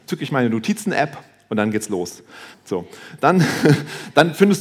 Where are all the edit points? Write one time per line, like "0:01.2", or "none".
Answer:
0:02.5